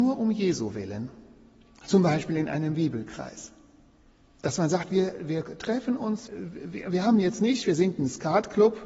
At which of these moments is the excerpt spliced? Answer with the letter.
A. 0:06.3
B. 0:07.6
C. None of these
A